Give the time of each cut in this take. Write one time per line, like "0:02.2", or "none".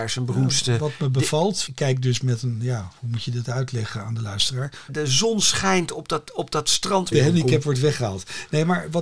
0:01.7
0:04.9
0:07.1